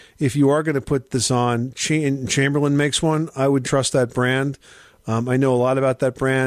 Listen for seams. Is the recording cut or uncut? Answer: cut